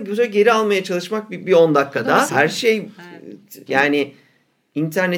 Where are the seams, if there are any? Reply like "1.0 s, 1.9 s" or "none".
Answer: 2.3 s, 3.7 s